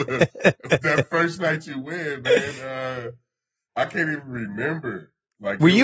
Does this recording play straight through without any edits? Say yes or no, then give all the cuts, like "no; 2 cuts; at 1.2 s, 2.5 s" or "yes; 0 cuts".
yes; 0 cuts